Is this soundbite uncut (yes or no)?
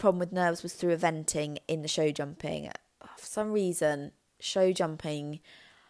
yes